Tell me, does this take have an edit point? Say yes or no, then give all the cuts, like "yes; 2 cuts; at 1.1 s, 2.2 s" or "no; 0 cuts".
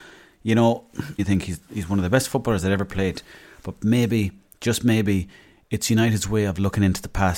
yes; 1 cut; at 1.2 s